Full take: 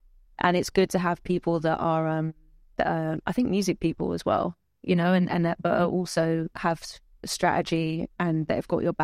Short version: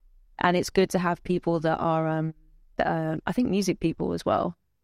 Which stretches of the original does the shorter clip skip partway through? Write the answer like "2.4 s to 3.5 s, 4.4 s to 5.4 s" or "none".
none

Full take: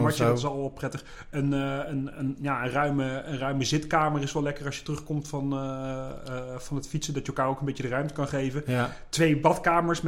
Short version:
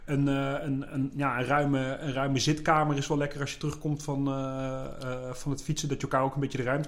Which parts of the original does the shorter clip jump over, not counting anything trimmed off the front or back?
none

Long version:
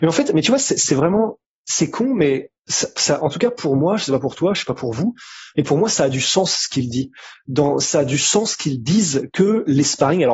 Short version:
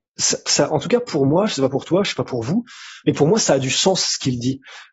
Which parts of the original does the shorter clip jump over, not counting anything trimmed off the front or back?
none

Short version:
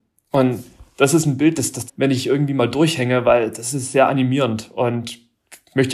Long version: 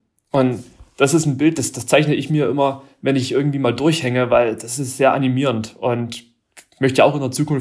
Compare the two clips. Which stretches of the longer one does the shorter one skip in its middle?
1.9 s to 2.9 s

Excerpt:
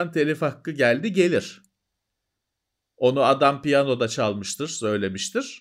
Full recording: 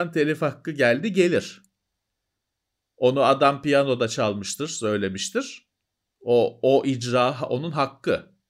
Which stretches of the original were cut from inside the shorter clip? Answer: none

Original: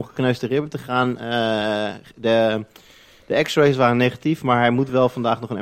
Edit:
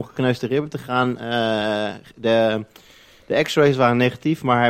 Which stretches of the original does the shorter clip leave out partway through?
none

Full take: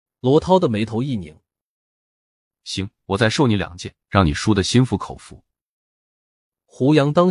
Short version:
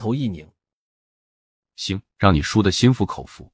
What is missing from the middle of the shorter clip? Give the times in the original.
3.0 s to 4.0 s

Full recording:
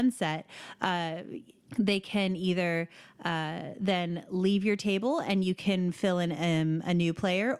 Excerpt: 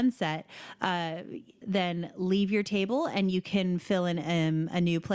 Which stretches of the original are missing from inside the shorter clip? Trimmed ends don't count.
1.6 s to 3.7 s

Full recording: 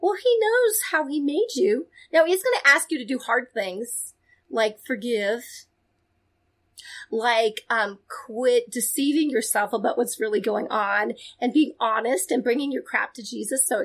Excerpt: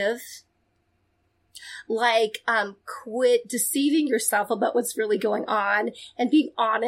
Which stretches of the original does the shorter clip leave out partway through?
none

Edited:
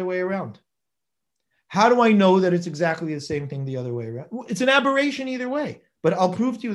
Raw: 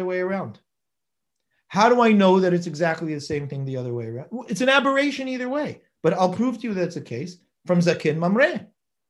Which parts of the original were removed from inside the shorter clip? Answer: none

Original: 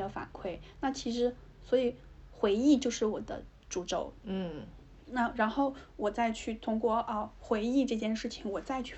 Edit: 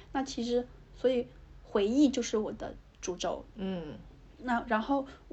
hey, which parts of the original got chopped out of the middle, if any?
none

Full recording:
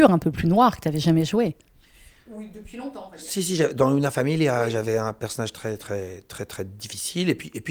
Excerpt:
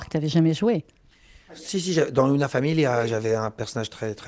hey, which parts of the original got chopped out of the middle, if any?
2.2 s to 3.1 s

